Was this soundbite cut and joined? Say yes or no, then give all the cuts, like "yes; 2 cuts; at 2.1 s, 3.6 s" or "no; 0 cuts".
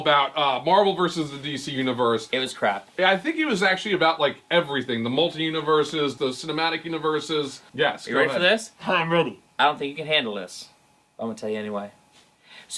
yes; 2 cuts; at 6.2 s, 7.7 s